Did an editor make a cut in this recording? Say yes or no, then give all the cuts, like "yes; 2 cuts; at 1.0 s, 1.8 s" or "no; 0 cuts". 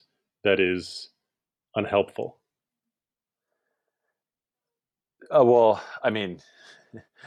no; 0 cuts